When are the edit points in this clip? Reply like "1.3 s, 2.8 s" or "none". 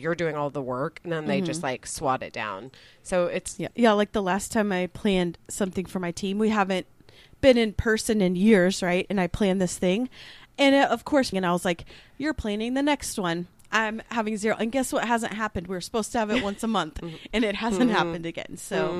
3.7 s, 11.3 s